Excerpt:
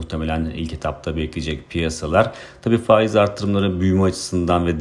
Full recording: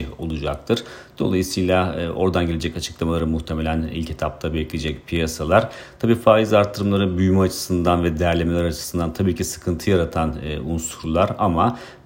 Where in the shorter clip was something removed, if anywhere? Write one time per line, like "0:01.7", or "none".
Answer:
none